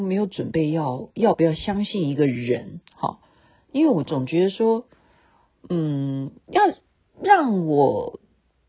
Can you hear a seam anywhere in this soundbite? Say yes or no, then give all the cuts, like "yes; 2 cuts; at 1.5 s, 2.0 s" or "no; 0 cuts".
no; 0 cuts